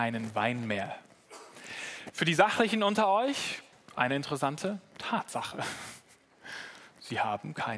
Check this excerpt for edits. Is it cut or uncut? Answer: cut